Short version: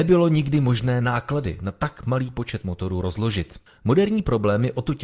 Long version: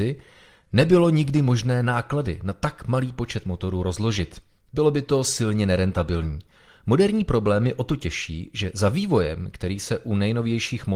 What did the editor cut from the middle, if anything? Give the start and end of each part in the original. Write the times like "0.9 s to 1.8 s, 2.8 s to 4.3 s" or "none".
4.5 s to 6.7 s